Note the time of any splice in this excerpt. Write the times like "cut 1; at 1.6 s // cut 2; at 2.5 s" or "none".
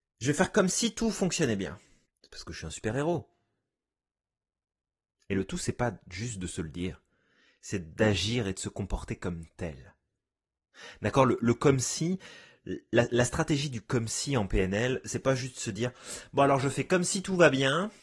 cut 1; at 2.1 s